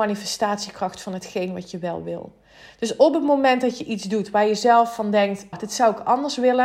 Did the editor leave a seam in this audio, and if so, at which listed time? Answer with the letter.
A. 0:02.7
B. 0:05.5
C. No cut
B